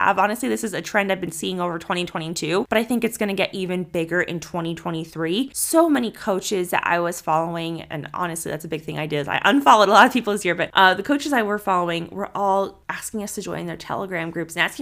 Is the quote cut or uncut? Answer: uncut